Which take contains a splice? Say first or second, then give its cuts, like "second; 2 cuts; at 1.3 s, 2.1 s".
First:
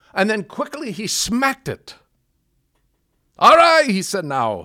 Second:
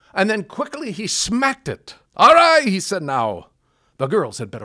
second; 1 cut; at 2.1 s